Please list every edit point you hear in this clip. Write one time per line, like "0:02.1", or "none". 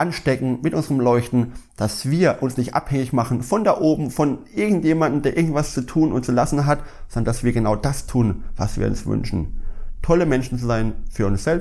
none